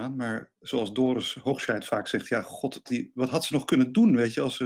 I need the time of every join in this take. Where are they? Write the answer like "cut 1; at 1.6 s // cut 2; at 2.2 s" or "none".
cut 1; at 2.9 s

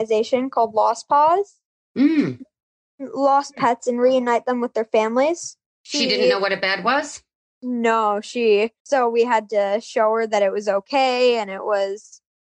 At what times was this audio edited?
cut 1; at 5.7 s // cut 2; at 8.8 s

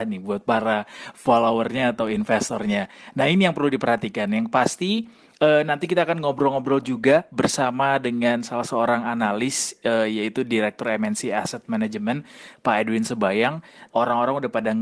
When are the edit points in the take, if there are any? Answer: cut 1; at 13.9 s

